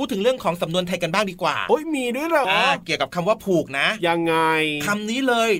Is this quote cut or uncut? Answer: cut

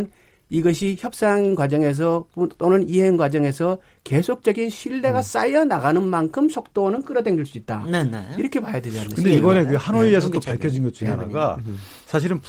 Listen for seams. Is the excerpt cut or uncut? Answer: uncut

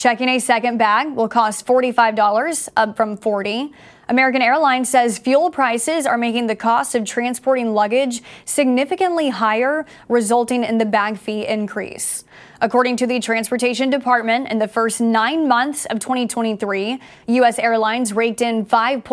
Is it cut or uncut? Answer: uncut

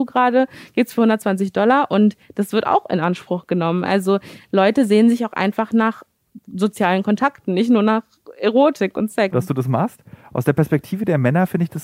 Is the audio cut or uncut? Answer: cut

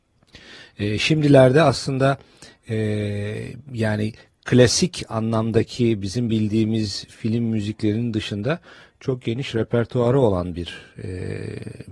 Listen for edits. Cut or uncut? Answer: uncut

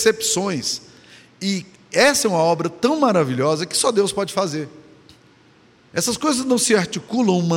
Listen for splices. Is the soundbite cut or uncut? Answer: uncut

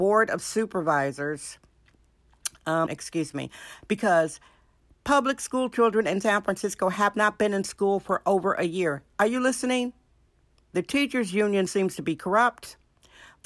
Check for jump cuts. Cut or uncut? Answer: cut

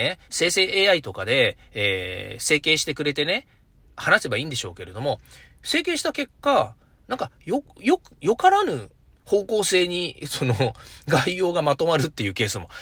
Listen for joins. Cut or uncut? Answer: uncut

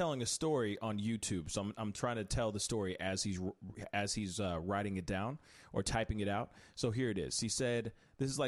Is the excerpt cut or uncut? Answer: uncut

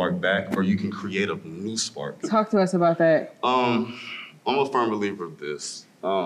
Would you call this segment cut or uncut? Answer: cut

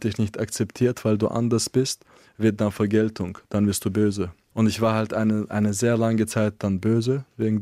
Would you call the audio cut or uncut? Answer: cut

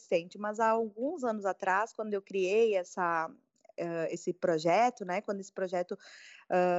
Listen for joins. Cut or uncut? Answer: uncut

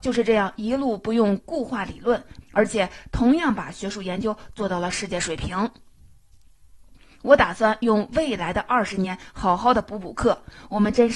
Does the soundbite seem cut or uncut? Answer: cut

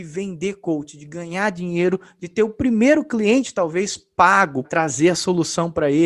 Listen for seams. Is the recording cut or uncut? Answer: cut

